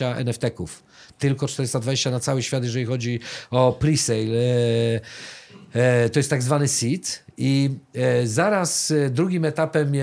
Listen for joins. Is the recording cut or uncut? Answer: uncut